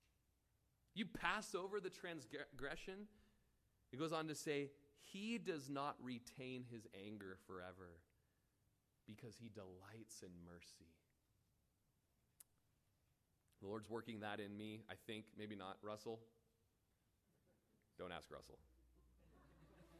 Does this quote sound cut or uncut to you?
uncut